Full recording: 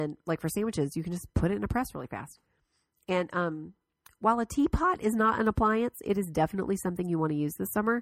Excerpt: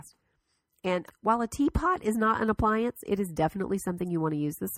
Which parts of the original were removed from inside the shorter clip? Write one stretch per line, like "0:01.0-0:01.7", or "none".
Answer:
0:03.3-0:04.0